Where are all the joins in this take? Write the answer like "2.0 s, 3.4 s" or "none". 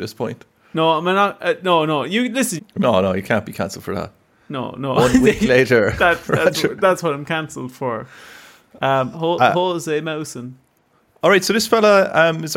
2.6 s